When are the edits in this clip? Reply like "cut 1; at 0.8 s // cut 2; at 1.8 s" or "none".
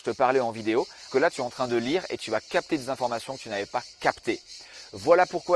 cut 1; at 1.1 s